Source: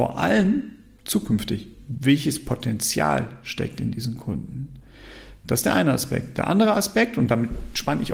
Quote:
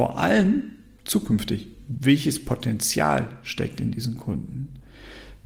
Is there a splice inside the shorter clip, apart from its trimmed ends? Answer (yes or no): no